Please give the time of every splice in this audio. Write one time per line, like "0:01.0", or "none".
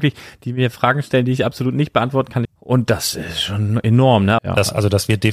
0:02.5
0:04.4

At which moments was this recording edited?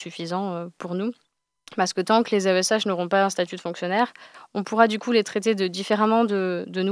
none

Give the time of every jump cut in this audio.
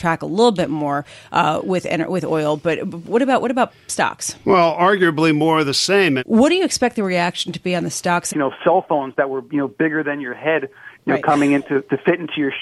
0:06.2
0:08.3

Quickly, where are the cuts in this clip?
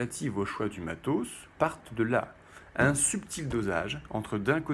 0:01.5

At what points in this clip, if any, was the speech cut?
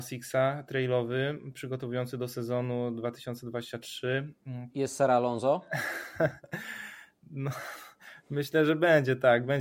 0:04.7

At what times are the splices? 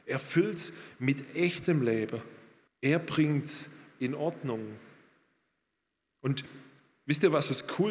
0:02.7

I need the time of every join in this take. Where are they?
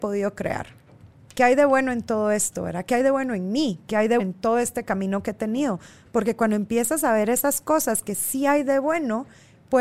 0:04.2

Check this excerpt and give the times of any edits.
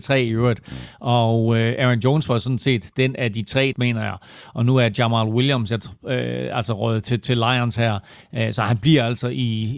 0:03.7
0:07.0

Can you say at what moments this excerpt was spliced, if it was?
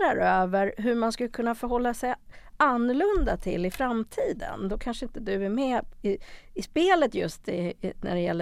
none

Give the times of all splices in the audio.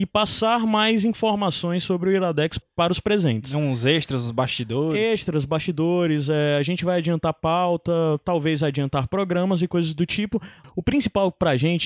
none

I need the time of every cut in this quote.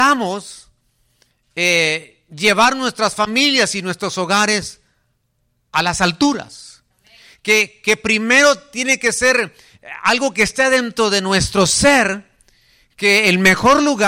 none

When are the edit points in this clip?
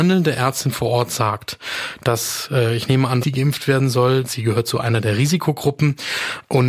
0:03.2
0:04.2

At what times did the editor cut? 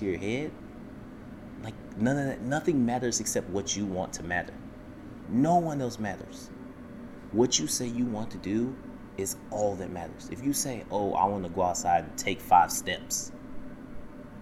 0:05.2

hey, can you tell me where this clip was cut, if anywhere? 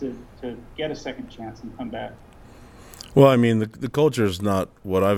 none

